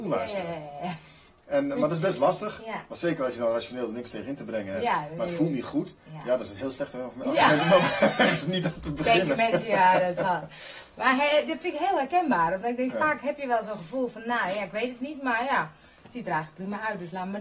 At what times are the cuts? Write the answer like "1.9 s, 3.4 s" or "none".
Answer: none